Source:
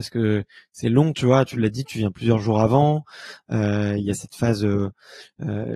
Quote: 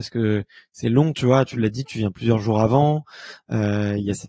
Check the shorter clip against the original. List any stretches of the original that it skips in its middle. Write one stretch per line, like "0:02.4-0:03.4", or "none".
none